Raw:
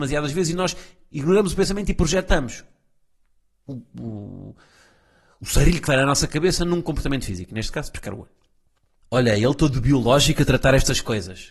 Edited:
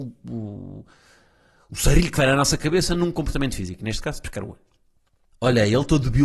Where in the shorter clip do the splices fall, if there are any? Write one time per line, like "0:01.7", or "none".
none